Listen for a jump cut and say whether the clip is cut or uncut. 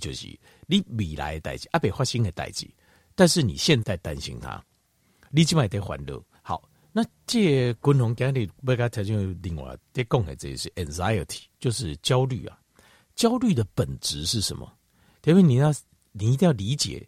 cut